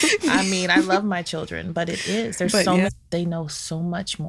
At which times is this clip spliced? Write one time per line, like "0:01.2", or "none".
0:02.9